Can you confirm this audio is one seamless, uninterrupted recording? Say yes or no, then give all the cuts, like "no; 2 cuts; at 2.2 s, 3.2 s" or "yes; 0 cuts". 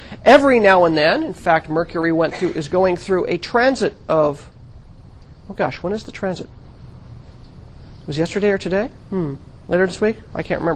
yes; 0 cuts